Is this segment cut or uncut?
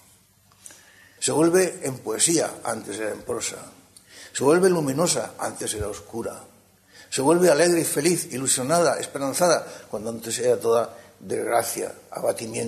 cut